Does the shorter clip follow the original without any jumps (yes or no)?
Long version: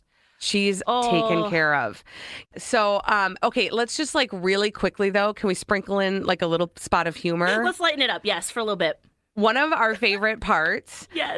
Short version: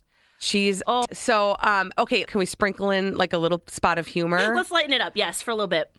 no